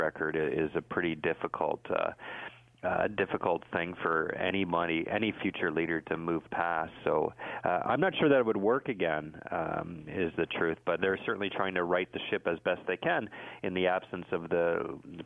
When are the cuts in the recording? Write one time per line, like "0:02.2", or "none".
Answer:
0:11.0